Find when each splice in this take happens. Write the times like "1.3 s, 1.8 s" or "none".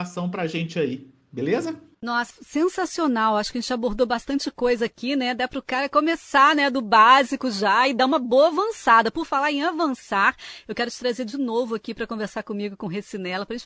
2.3 s